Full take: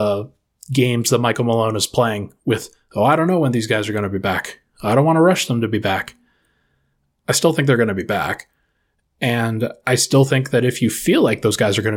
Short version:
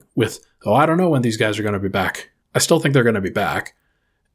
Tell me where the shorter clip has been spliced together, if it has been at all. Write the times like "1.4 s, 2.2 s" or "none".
2.4 s